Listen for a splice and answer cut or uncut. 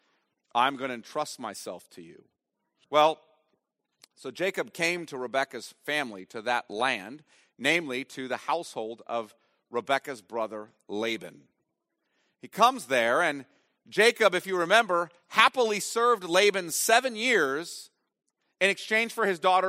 cut